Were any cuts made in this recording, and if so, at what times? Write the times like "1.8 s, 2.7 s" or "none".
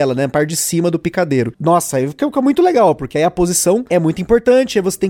none